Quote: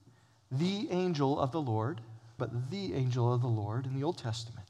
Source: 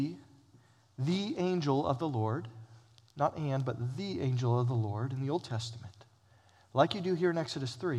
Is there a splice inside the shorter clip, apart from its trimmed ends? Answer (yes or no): yes